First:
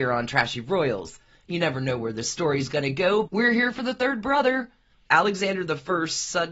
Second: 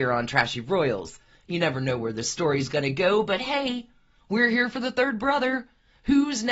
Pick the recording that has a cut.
first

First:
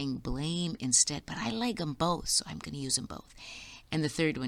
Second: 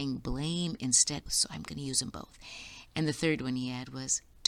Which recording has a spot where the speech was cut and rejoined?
second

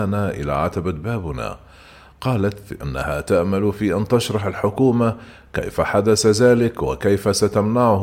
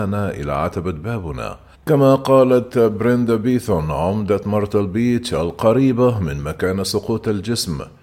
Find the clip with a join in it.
second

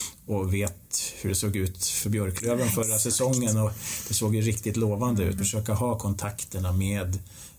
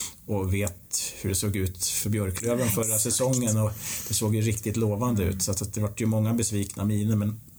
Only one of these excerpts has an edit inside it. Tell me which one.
first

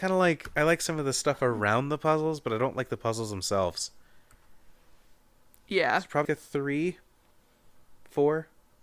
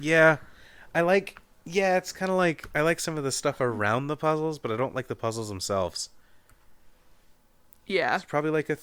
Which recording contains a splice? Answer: first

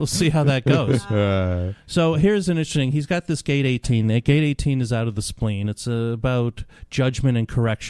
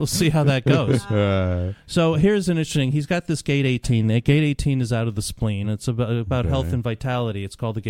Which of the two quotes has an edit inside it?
second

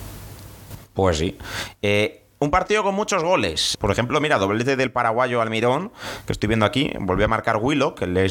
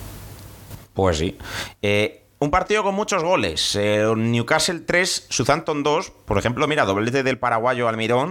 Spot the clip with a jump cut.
first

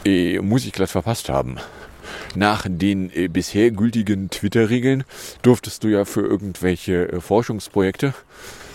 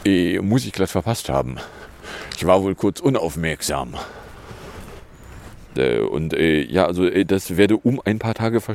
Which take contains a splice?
first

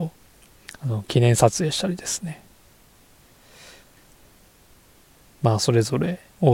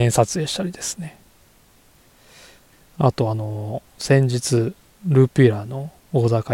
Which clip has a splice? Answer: second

